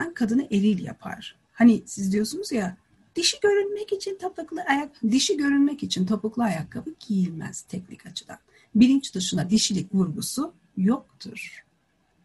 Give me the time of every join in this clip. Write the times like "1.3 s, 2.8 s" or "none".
none